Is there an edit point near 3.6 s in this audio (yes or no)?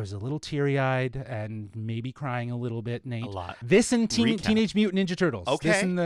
yes